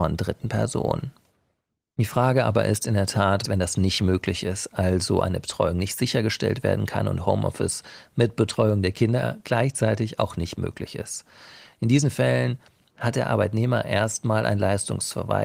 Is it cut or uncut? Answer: cut